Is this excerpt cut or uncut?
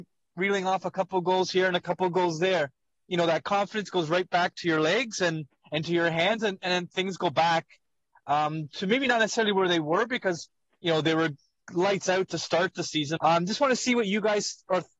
cut